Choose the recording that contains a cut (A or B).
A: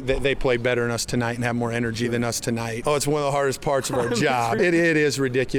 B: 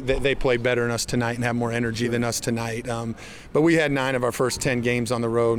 A